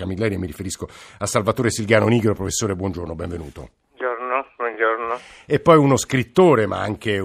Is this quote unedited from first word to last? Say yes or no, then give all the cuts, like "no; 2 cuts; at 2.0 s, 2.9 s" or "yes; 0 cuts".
yes; 0 cuts